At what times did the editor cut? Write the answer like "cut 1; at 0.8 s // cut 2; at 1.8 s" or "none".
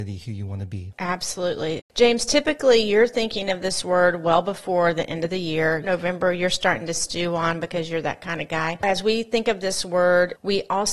cut 1; at 5.8 s // cut 2; at 8.8 s